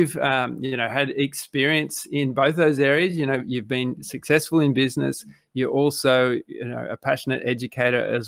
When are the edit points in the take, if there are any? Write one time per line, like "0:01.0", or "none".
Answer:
none